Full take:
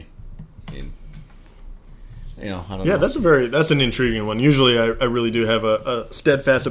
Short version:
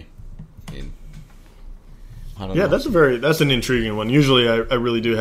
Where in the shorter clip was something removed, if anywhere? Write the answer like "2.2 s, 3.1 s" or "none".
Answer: 2.4 s